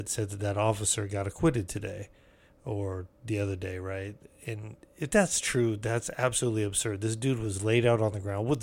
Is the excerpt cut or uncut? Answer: uncut